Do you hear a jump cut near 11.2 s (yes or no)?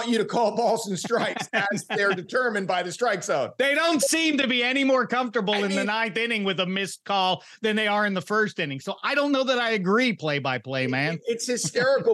no